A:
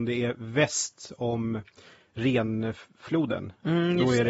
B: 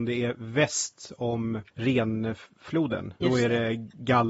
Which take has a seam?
B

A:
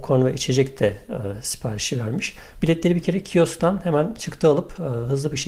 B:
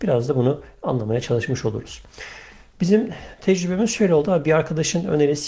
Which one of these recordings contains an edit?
A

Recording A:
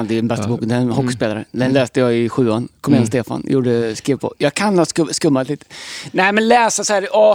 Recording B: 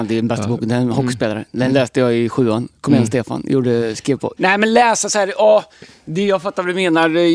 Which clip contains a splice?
B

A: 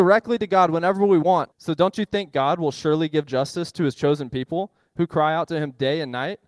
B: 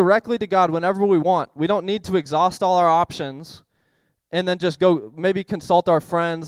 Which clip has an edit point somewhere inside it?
A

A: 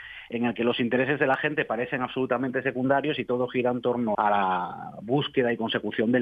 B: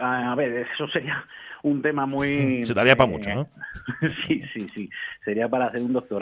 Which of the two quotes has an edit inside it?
A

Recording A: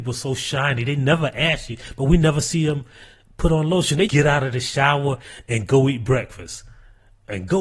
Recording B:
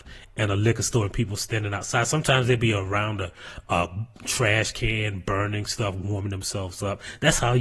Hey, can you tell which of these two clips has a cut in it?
A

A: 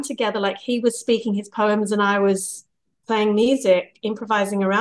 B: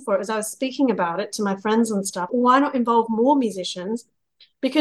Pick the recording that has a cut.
B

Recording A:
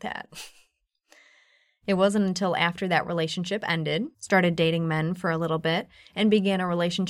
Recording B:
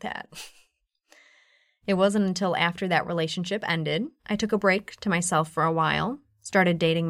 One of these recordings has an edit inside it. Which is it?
A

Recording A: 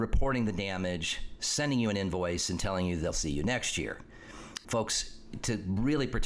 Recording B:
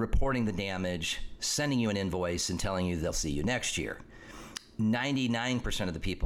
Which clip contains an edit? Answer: A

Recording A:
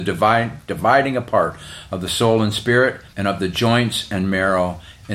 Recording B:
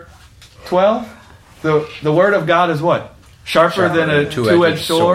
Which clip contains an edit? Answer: A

